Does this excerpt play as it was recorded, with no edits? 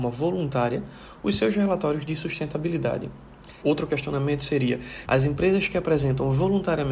no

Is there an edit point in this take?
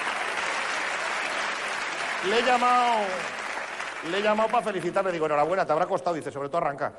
no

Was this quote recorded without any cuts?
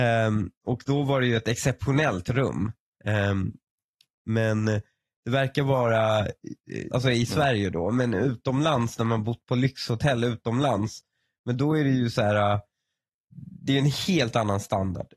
no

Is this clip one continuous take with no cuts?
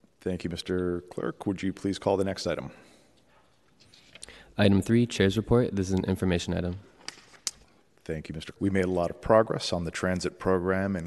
no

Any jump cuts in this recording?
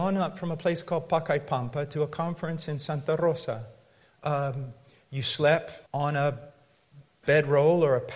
yes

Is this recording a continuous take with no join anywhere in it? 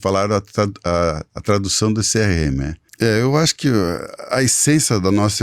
no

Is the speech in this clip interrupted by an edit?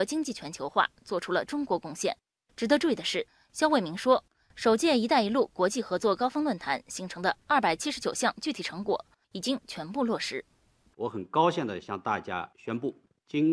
no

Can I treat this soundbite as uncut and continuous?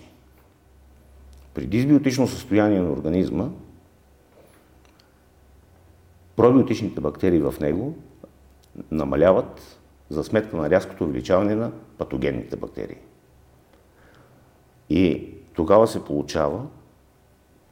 no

